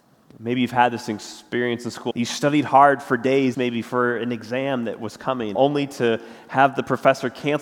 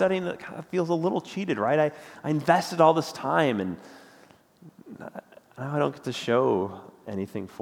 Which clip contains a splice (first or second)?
first